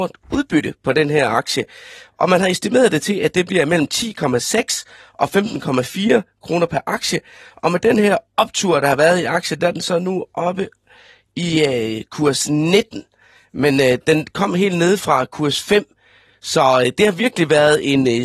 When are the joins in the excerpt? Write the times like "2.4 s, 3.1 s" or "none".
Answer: none